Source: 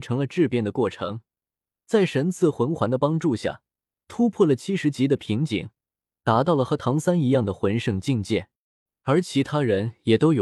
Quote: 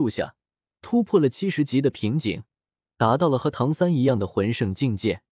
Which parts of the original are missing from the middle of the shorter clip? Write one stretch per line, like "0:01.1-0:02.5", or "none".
none